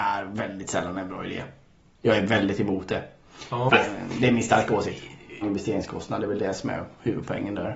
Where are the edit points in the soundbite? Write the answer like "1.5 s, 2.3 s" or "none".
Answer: 3.7 s, 5.4 s